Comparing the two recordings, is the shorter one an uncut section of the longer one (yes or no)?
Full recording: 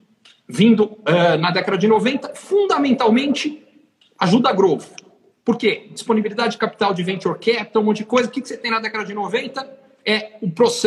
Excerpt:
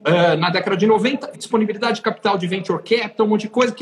no